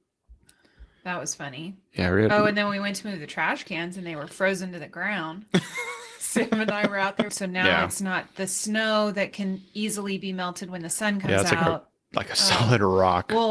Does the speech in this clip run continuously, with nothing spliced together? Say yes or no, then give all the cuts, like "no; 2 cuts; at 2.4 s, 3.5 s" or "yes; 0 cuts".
no; 1 cut; at 7.3 s